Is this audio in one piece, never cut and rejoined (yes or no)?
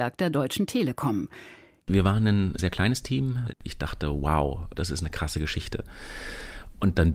no